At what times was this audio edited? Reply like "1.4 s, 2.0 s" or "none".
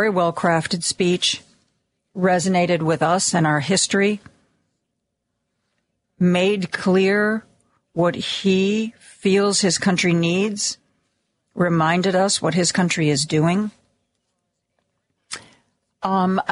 none